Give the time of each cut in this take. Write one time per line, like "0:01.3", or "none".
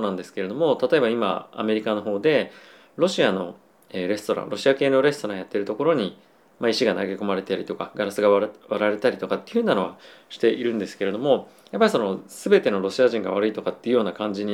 none